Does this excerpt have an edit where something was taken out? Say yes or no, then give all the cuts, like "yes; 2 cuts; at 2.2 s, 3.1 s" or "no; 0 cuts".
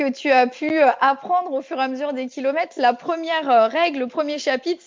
no; 0 cuts